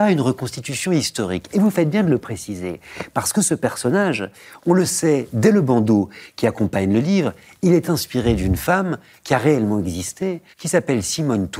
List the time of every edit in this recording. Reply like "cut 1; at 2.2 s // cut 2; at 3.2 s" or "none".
cut 1; at 10.5 s

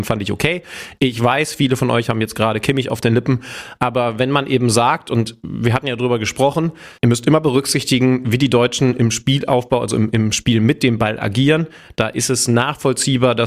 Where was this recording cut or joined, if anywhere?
cut 1; at 7.0 s

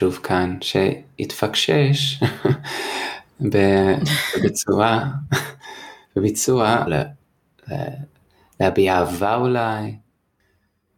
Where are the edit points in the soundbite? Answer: cut 1; at 6.9 s

